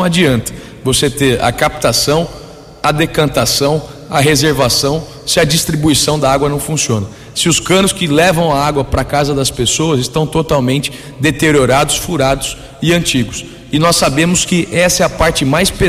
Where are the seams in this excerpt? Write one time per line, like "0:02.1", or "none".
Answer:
none